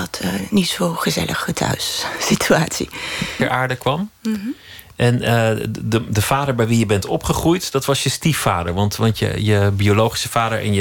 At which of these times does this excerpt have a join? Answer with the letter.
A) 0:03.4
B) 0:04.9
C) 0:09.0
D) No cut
A